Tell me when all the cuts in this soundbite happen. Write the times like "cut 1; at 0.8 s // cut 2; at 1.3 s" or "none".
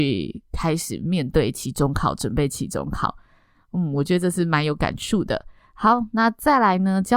none